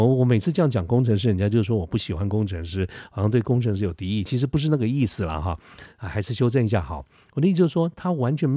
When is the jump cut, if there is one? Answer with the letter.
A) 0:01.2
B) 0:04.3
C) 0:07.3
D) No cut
D